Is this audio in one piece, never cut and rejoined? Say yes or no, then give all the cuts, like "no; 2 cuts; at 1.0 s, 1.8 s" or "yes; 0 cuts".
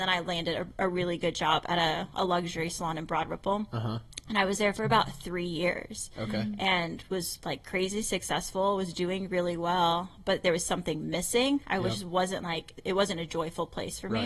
yes; 0 cuts